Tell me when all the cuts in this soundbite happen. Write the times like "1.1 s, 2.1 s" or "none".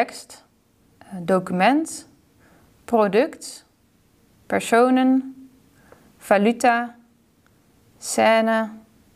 none